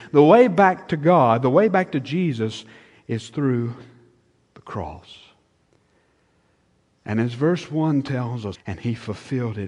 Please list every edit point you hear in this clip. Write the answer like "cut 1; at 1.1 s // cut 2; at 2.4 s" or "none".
cut 1; at 8.5 s